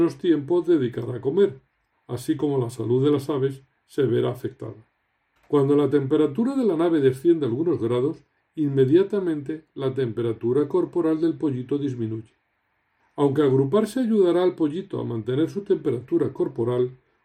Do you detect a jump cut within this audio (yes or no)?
yes